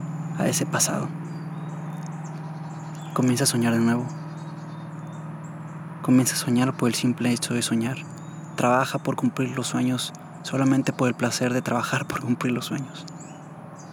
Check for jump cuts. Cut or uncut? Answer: uncut